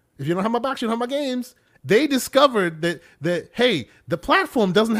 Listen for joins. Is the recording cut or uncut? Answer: cut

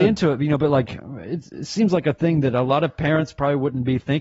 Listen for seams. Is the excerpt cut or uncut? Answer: uncut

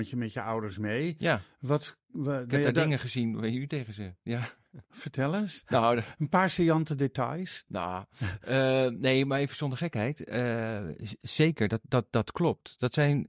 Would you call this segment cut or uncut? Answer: uncut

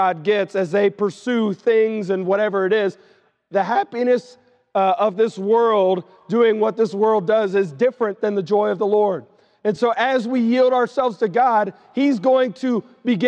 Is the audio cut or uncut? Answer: uncut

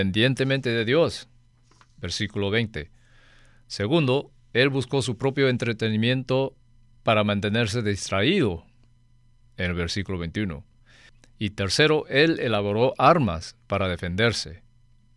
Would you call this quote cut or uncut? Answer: uncut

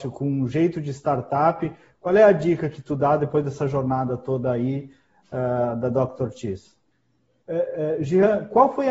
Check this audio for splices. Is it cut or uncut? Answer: cut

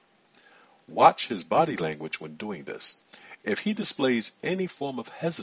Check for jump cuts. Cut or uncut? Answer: uncut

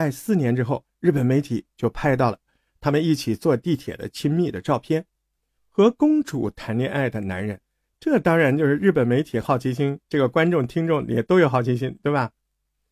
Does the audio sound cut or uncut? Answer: cut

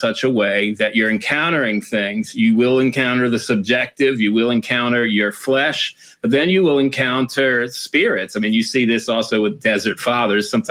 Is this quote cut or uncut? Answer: uncut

